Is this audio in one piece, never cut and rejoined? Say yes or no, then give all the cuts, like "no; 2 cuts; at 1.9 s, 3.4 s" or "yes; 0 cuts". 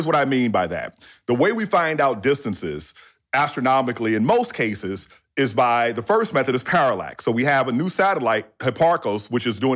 yes; 0 cuts